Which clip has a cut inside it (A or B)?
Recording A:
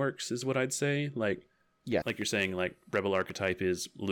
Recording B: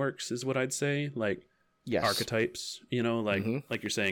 A